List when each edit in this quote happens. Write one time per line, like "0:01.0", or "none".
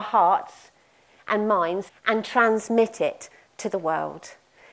0:01.9

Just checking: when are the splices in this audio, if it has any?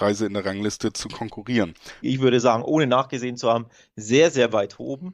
0:02.0

